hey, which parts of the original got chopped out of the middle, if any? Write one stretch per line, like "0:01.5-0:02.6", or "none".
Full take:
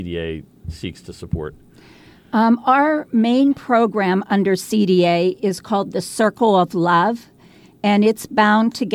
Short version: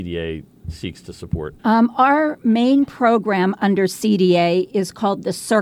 0:01.6-0:02.3